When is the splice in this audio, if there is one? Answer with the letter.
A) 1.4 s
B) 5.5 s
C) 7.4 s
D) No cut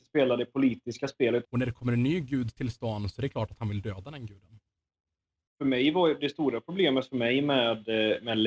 A